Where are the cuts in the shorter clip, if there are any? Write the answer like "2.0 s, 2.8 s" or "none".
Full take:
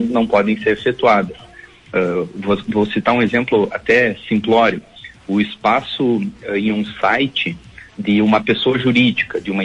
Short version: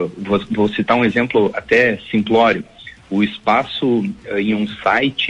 none